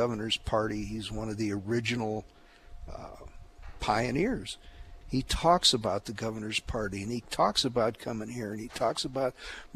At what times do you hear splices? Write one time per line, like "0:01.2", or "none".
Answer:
0:05.0

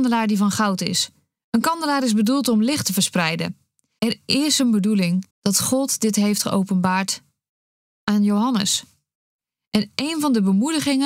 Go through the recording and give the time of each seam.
0:01.4
0:04.0
0:05.3

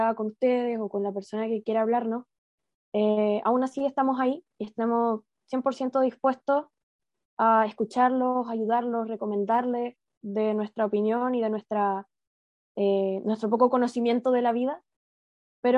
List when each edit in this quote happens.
none

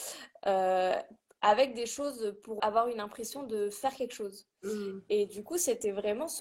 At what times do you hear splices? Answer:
0:02.6

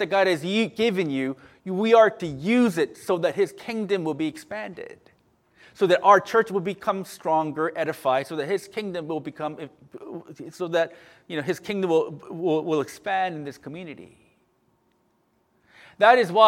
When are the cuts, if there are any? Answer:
none

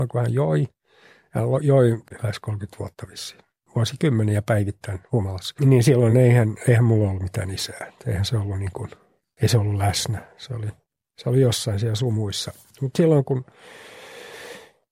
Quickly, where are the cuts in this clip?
none

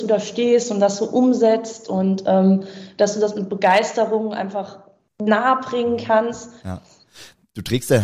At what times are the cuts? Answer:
0:06.6

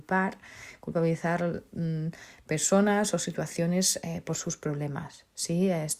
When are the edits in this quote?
none

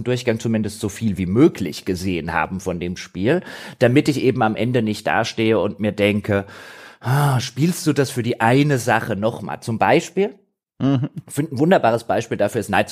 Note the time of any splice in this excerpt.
none

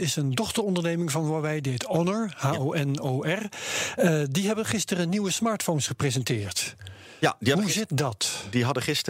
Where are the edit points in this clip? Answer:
none

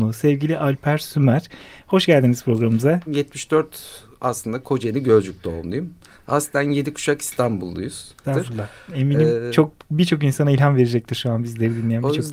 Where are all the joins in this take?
0:03.1
0:08.2

